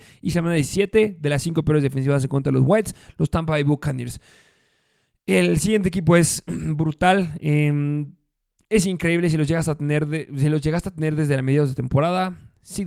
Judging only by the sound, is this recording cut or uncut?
uncut